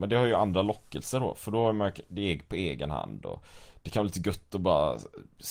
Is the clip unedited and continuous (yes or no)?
yes